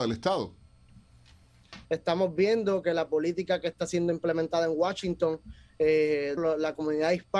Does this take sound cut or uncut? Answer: cut